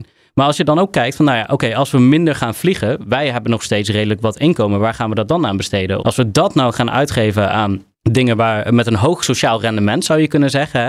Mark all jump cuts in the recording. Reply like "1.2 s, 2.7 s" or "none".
6.0 s, 7.9 s